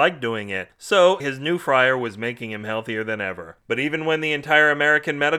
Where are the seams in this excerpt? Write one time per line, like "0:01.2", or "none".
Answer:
0:01.2